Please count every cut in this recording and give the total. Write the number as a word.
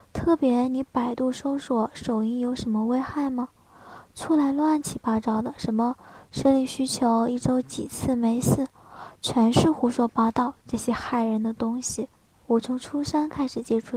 one